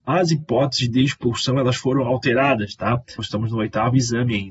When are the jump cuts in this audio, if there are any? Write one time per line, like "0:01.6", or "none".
0:03.2